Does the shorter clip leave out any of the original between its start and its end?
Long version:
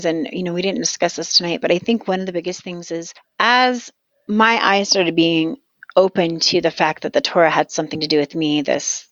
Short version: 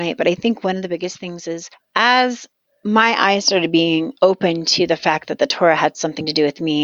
yes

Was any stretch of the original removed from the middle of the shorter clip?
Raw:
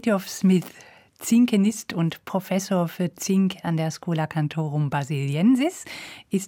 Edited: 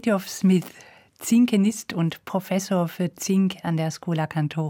no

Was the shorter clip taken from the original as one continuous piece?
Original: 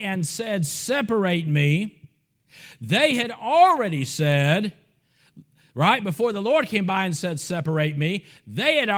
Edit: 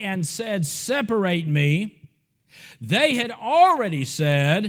yes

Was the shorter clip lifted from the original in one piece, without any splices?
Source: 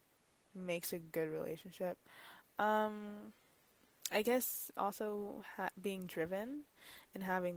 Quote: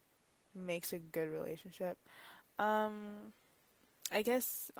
yes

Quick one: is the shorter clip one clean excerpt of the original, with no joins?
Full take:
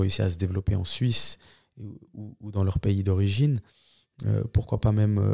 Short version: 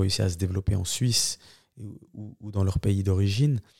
yes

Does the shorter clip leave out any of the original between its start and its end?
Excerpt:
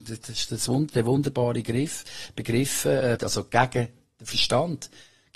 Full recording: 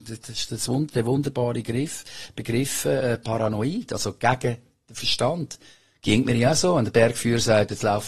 yes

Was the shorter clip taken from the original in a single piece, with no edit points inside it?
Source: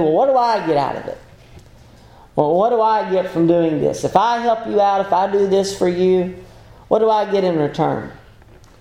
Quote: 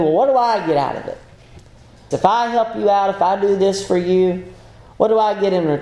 no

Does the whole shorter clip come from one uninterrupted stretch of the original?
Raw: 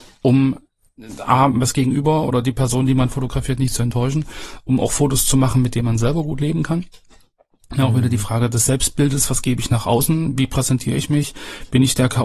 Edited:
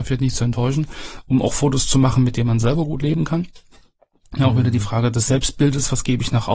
yes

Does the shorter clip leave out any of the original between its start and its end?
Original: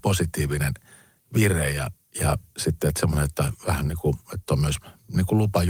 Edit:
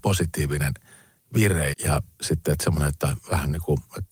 yes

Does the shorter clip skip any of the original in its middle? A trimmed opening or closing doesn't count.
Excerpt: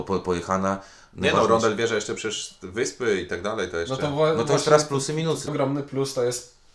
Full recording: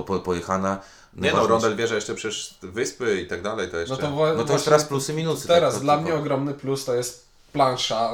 yes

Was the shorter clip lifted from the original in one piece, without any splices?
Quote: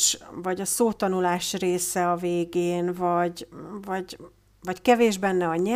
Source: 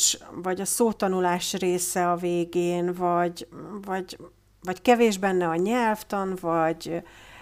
yes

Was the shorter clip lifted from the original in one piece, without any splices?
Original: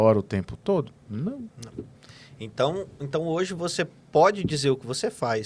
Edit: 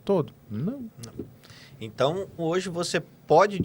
no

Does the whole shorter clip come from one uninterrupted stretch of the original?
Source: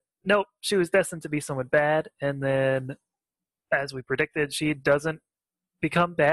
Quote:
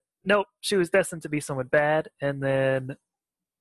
yes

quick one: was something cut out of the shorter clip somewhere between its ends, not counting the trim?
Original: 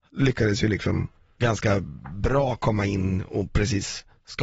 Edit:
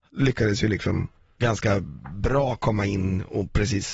no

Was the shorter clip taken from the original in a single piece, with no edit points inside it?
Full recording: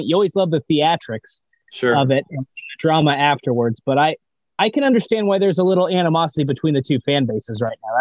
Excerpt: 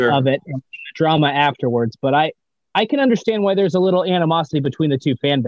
yes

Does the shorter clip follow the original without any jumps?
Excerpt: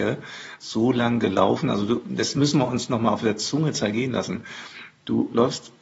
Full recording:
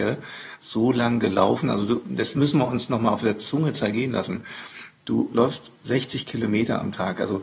yes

